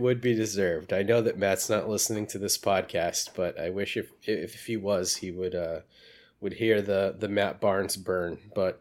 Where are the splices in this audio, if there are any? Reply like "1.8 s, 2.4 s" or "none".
none